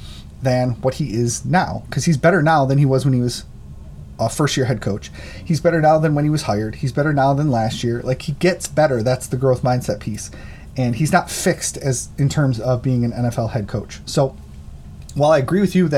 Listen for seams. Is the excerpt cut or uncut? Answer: uncut